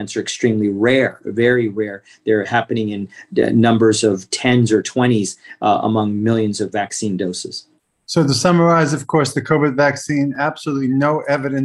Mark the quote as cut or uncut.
uncut